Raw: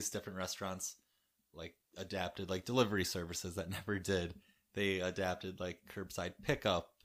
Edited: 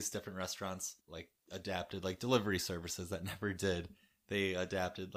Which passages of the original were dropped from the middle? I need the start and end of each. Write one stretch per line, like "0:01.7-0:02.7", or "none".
0:01.0-0:01.5